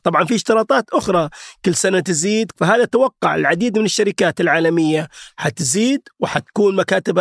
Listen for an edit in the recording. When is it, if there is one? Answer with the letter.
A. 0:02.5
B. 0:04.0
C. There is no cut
A